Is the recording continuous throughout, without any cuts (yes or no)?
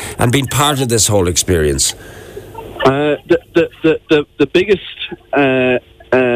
yes